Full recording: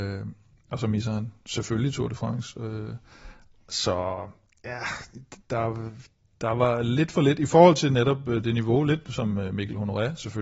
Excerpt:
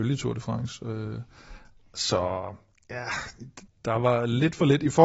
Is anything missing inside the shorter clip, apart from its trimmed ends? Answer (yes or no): yes